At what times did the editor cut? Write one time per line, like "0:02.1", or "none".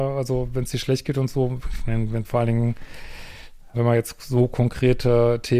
0:03.7